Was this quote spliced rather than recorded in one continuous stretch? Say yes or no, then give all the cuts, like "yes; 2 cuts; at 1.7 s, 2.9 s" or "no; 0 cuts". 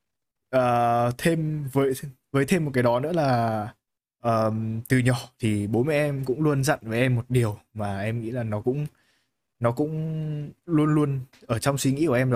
no; 0 cuts